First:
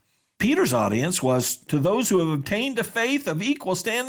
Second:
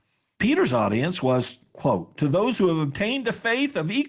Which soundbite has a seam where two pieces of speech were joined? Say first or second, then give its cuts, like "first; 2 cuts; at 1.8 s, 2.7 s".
first; 1 cut; at 1.7 s